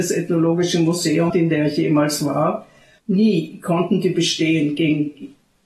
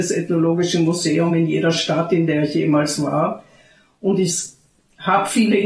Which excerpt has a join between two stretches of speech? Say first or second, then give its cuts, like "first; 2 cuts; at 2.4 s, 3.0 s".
first; 2 cuts; at 1.3 s, 3.0 s